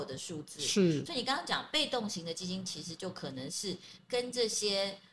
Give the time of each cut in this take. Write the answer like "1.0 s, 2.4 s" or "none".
none